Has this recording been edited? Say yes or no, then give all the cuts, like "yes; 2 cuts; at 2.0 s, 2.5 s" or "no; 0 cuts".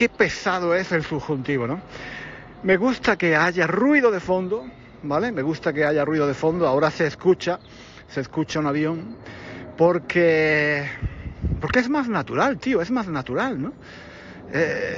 no; 0 cuts